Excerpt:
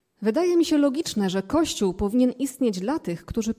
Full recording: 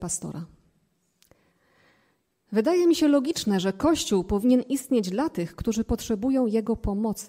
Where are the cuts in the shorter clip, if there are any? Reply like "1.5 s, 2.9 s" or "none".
none